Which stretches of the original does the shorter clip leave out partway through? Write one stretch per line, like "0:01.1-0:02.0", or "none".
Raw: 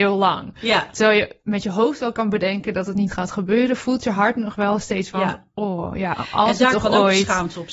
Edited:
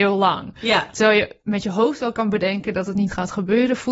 none